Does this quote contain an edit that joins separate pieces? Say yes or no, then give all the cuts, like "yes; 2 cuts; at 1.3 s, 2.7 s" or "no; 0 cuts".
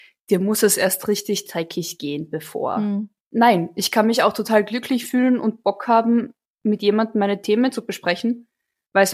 no; 0 cuts